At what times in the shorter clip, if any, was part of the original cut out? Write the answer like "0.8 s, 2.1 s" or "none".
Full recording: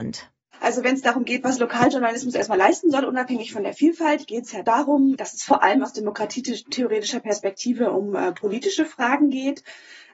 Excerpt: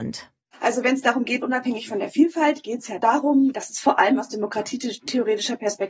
1.4 s